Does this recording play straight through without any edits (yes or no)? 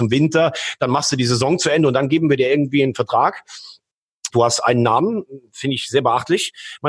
no